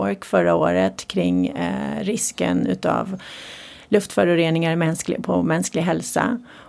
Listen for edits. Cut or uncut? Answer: uncut